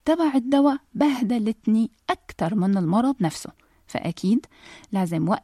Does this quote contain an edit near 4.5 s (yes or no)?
no